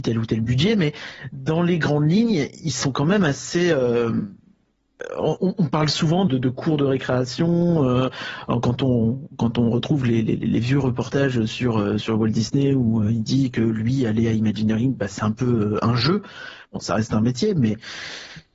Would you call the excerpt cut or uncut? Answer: cut